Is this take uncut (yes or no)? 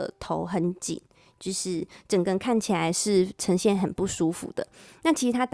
yes